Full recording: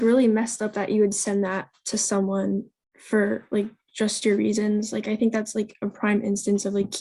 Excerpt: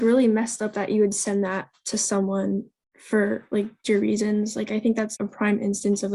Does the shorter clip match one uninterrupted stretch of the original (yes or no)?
no